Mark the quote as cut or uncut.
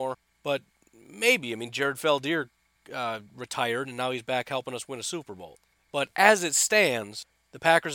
uncut